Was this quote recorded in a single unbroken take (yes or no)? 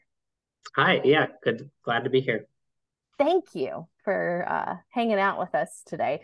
yes